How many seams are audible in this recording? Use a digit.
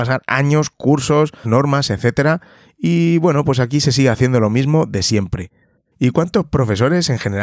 2